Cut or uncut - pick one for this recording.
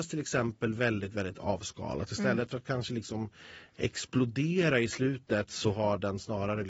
uncut